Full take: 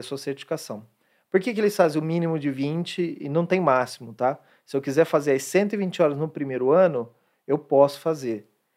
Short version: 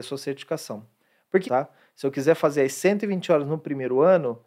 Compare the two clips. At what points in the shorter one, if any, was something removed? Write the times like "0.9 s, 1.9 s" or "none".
1.4 s